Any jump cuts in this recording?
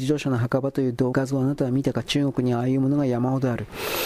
yes; 1 cut; at 1.1 s

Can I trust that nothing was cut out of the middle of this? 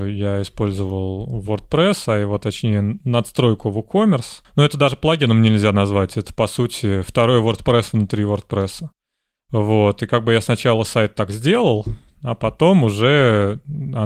yes; 0 cuts

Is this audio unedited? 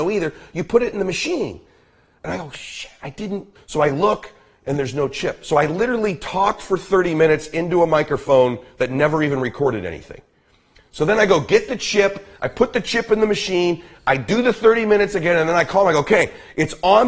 no; 1 cut; at 3.6 s

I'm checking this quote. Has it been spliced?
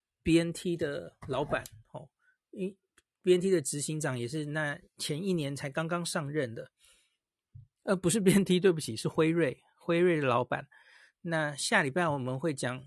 no; 0 cuts

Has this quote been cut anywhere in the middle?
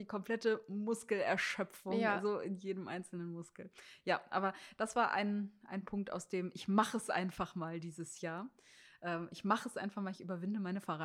no; 0 cuts

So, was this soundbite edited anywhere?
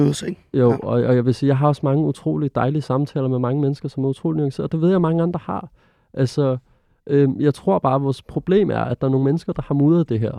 no; 0 cuts

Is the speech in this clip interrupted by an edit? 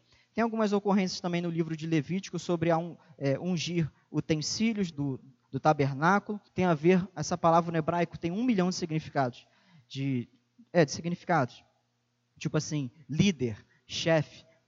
yes; 2 cuts; at 4.9 s, 6.5 s

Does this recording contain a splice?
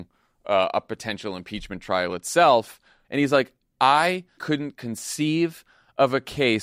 yes; 2 cuts; at 3.0 s, 4.4 s

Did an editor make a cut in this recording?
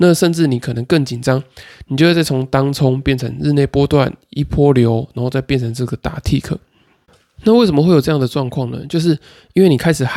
no; 0 cuts

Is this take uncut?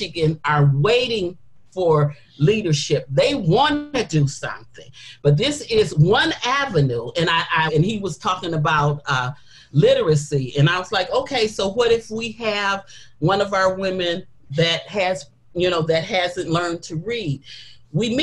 no; 1 cut; at 7.7 s

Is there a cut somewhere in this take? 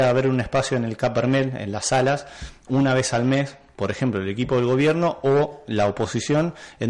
no; 0 cuts

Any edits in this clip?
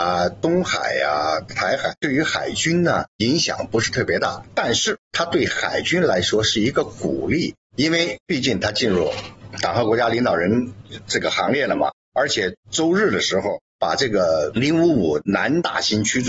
yes; 3 cuts; at 1.9 s, 12.0 s, 13.7 s

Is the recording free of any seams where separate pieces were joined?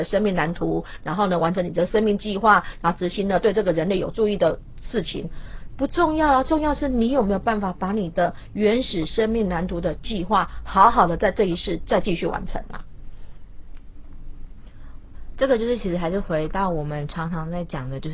no; 1 cut; at 5.7 s

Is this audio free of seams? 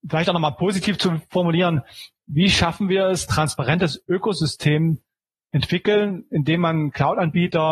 no; 1 cut; at 3.3 s

